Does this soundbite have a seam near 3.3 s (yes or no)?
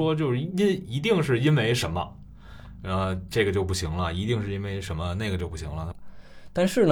no